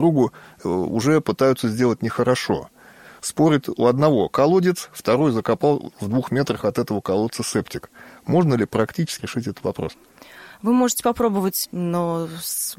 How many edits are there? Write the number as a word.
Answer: two